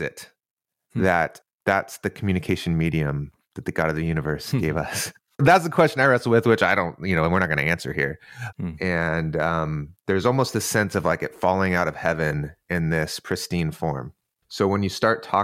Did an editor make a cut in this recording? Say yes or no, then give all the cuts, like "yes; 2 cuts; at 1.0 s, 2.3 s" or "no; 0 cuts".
yes; 1 cut; at 8.5 s